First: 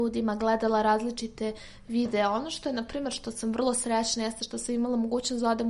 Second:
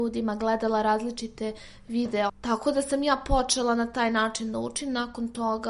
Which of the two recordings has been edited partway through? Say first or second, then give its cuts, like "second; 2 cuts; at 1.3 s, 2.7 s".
second; 1 cut; at 2.3 s